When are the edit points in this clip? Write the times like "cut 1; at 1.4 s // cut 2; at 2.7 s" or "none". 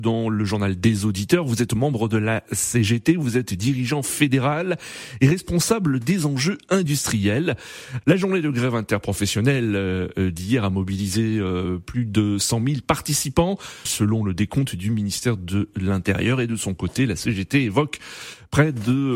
cut 1; at 8.0 s // cut 2; at 13.9 s